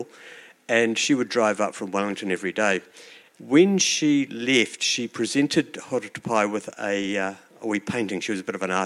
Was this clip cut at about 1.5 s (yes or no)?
no